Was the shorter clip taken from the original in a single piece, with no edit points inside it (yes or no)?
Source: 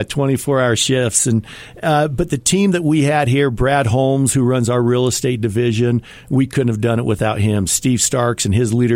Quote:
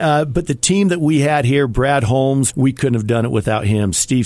no